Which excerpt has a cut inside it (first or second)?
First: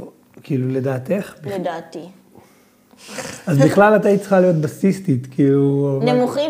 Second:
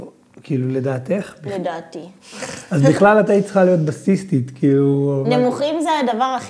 second